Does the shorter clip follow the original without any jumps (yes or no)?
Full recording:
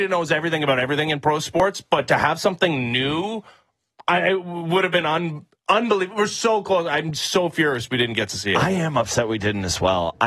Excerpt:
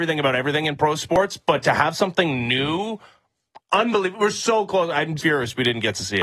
no